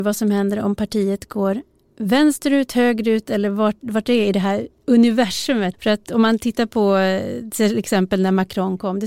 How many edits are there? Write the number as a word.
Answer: one